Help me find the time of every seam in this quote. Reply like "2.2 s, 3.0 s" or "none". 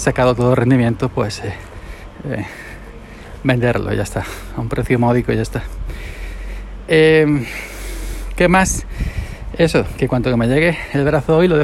none